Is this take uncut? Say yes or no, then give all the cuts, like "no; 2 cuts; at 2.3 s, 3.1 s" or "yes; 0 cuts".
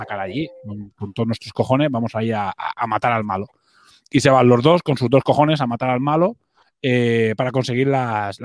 yes; 0 cuts